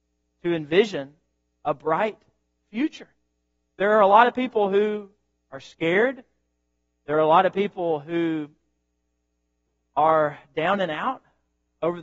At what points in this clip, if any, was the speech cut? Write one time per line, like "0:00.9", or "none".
none